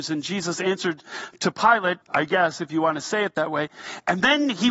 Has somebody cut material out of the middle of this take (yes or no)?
yes